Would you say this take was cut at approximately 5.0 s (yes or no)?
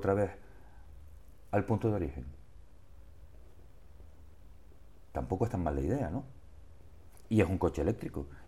no